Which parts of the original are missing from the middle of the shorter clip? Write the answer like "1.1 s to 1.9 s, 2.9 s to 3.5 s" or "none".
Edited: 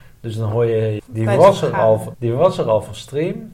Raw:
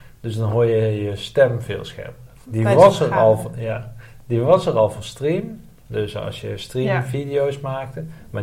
1.0 s to 2.4 s, 3.5 s to 4.2 s